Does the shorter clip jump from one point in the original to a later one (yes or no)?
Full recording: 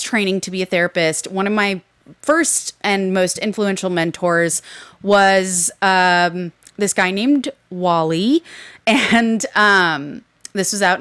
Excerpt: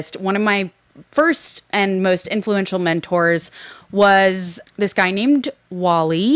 yes